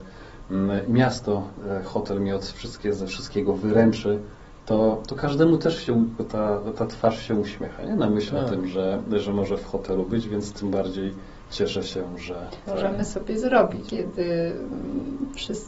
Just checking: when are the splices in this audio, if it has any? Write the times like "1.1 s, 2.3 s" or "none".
12.7 s, 13.9 s